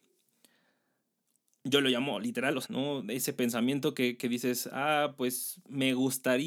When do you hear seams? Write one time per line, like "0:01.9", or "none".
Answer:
0:02.6

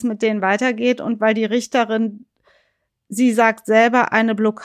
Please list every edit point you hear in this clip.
none

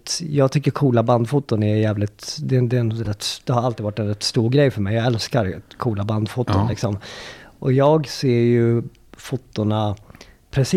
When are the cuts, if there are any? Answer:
none

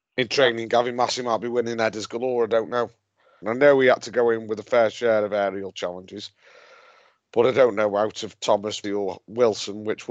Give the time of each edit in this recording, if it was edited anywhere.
0:03.4
0:08.8

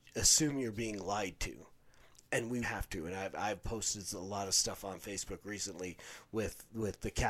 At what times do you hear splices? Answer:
0:02.6

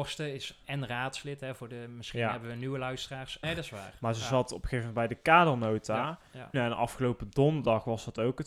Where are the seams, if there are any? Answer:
0:03.4
0:06.5

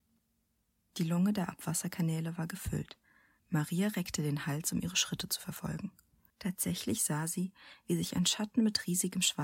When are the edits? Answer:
0:03.4
0:06.3

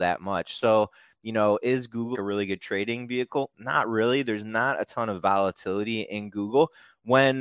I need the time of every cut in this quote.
0:02.1

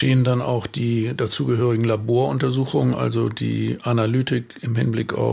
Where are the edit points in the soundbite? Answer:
none

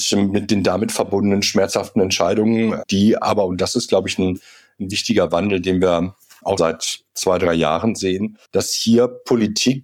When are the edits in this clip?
0:06.6
0:08.5

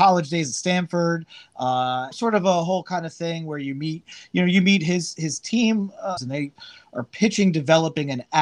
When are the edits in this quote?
0:02.1
0:06.2

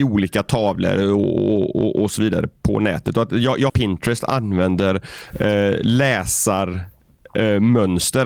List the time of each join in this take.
0:03.7

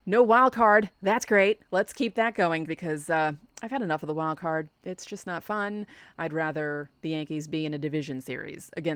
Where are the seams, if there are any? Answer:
0:02.7

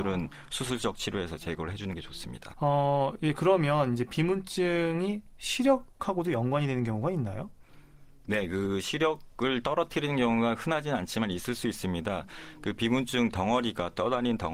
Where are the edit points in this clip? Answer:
0:02.5

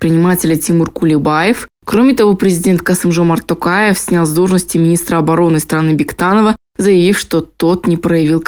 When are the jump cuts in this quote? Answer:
none

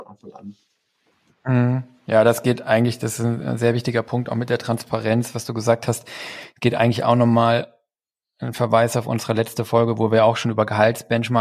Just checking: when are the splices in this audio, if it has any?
none

